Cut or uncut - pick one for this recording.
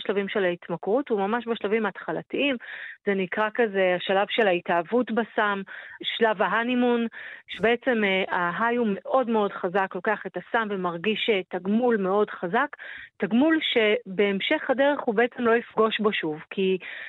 cut